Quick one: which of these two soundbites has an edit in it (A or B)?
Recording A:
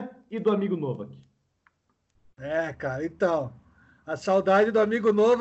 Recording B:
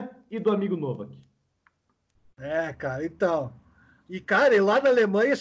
B